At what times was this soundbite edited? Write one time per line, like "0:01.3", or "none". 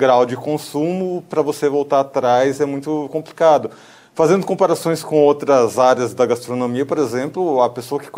none